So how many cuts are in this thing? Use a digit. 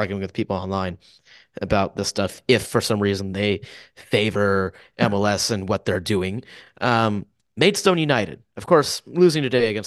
0